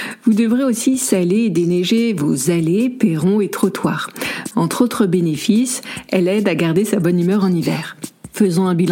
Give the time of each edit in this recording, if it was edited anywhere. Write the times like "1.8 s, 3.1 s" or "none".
4.5 s

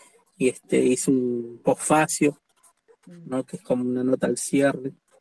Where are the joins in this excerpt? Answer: none

